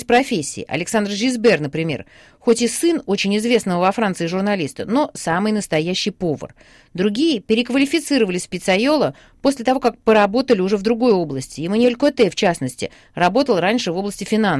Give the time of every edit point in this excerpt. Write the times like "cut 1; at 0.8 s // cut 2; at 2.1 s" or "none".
none